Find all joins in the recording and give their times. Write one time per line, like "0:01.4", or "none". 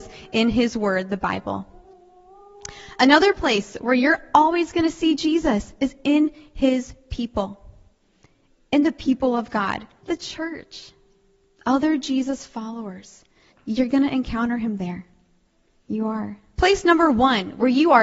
0:10.0
0:13.5
0:16.5